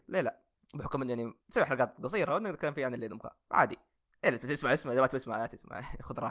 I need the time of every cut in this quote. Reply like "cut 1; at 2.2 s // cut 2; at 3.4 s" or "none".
cut 1; at 1.4 s